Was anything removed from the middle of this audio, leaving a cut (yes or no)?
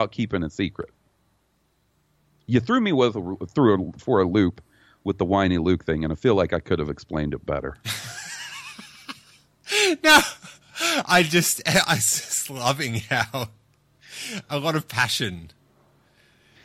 no